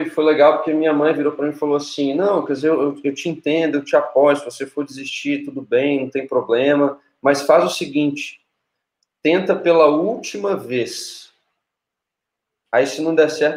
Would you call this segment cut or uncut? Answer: uncut